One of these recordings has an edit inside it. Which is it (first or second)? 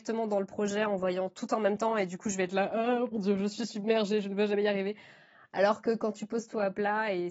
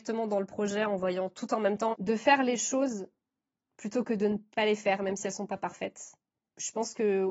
second